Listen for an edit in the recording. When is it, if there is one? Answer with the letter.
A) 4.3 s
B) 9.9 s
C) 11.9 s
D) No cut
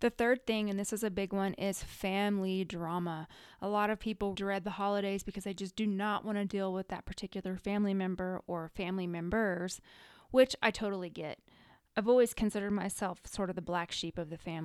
A